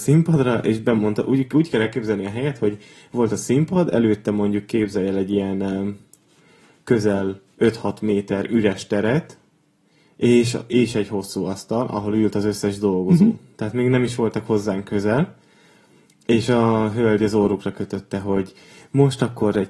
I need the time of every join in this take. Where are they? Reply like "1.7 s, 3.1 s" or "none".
none